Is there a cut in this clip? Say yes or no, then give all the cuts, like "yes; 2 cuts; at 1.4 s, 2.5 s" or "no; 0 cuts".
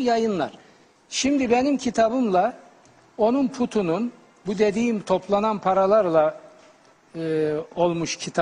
no; 0 cuts